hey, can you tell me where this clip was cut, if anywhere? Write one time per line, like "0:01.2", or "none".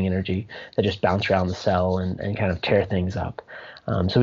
none

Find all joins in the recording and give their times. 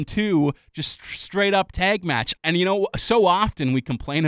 0:02.4

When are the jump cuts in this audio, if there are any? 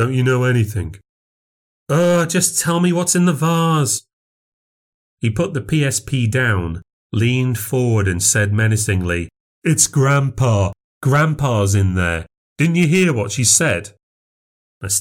none

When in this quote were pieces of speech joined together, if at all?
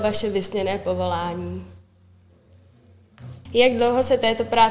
0:03.5

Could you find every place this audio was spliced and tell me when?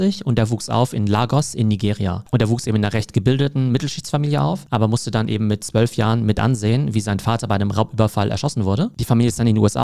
none

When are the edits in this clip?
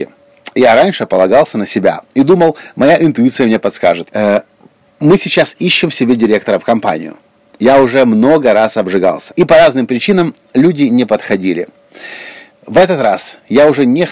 0:04.1
0:09.3

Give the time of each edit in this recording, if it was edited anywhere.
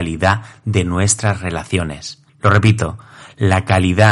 0:02.3

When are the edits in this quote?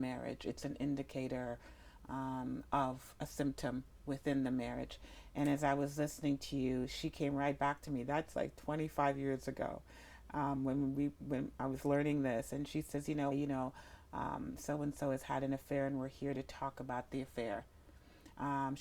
0:13.3

